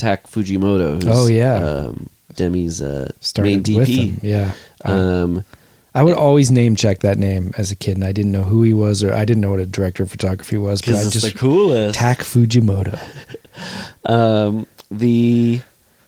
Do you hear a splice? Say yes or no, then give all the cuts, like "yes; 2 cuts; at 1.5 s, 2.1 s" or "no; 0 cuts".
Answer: no; 0 cuts